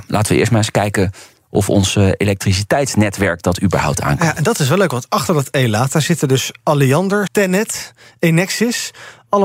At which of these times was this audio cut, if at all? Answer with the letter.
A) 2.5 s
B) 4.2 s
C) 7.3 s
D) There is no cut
C